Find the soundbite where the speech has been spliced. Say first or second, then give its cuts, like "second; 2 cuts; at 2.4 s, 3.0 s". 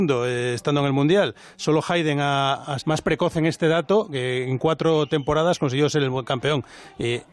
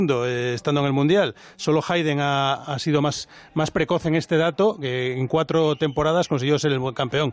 first; 1 cut; at 2.8 s